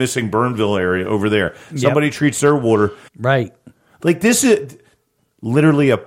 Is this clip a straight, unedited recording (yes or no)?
no